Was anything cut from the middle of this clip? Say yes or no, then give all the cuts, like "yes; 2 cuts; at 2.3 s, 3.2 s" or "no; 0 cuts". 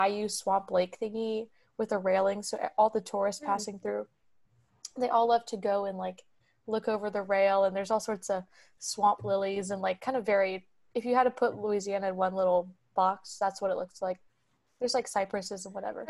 no; 0 cuts